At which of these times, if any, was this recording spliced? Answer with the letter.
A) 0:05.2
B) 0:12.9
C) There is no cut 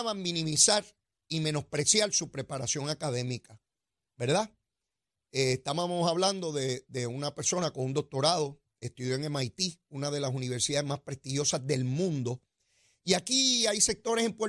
C